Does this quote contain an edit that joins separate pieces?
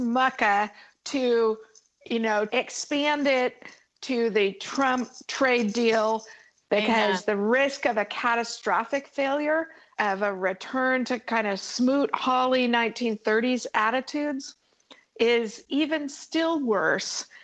yes; 3 cuts; at 2.5 s, 6.6 s, 10.0 s

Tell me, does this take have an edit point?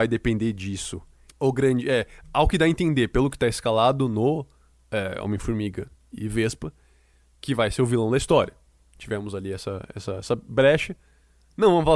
no; 0 cuts

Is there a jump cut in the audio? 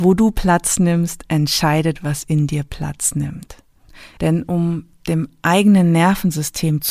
yes; 1 cut; at 4.2 s

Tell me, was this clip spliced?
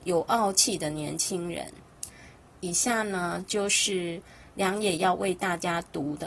yes; 1 cut; at 2.5 s

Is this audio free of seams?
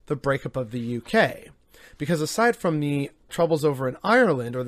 no; 1 cut; at 3.3 s

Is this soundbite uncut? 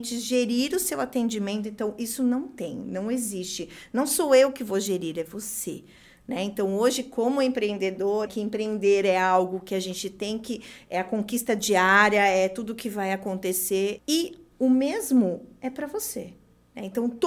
no; 2 cuts; at 8.3 s, 14.0 s

